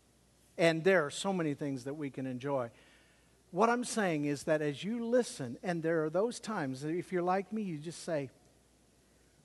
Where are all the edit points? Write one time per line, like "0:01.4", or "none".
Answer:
none